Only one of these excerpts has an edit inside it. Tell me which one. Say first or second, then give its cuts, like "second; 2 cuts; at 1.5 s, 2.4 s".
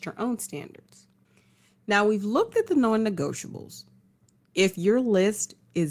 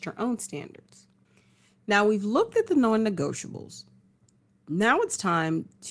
first; 1 cut; at 4.4 s